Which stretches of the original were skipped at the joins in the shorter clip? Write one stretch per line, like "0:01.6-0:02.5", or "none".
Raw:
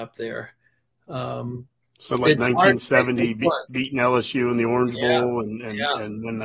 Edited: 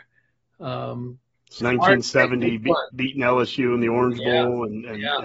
0:02.1-0:02.4